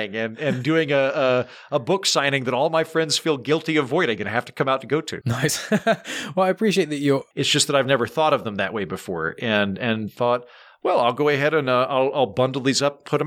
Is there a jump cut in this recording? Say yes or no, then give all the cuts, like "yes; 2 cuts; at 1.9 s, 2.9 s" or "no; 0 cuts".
yes; 2 cuts; at 5.2 s, 7.3 s